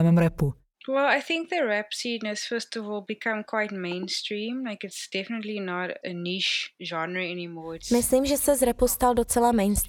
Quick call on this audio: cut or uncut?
uncut